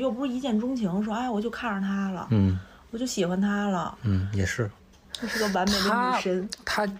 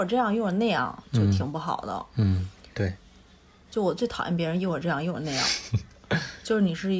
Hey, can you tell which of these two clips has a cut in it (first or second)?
first